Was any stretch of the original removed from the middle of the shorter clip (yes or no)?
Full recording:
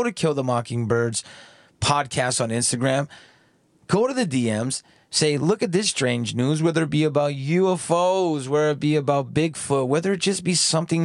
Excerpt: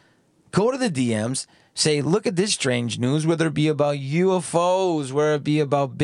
no